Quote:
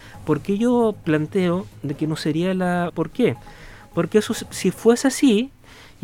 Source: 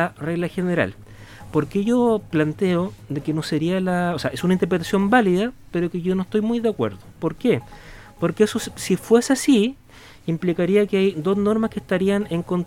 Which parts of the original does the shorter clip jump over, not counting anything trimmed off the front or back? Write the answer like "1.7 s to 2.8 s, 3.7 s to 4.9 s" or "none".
4.1 s to 7.1 s